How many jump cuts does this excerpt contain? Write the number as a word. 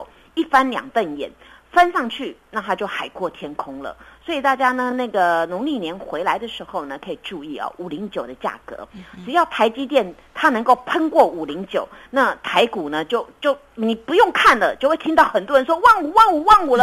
zero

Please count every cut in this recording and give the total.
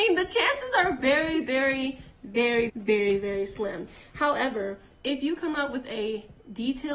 one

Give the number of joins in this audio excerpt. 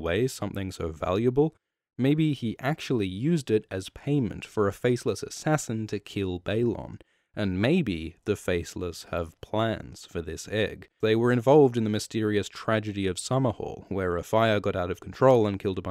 one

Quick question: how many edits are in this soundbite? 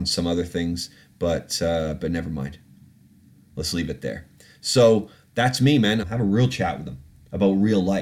one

